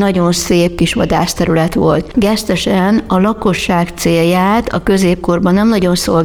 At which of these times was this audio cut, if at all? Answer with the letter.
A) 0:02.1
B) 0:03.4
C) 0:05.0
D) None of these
A